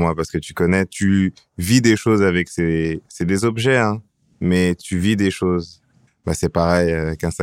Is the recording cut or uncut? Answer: cut